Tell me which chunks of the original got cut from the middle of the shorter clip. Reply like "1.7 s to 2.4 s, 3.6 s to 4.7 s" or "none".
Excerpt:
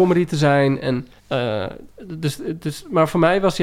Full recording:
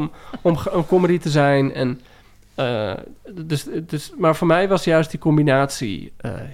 2.1 s to 2.4 s